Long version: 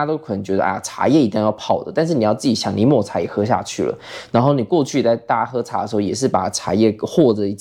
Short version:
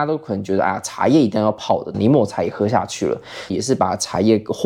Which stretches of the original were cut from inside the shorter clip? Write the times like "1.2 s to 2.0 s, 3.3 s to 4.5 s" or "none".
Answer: 1.9 s to 2.7 s, 4.3 s to 6.0 s